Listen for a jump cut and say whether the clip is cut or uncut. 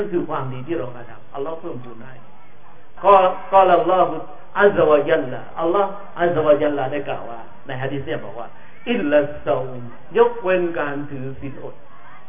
cut